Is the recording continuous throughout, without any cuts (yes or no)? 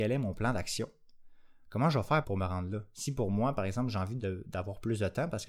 no